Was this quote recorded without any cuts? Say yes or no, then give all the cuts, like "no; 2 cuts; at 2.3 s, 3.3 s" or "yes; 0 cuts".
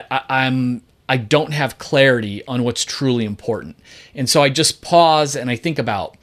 yes; 0 cuts